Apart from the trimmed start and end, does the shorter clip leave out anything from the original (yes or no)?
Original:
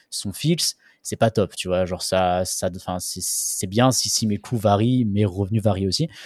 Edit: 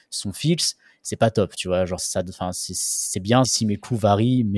yes